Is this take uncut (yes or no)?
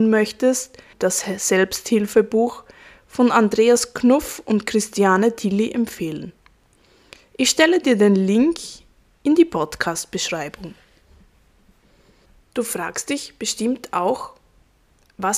no